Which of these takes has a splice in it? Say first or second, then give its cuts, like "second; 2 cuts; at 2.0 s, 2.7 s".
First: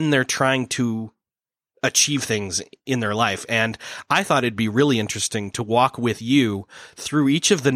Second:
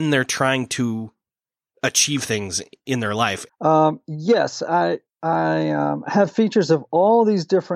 second; 1 cut; at 3.5 s